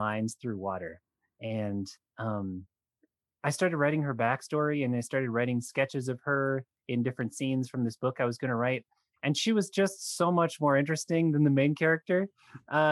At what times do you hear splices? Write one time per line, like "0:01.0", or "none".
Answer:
none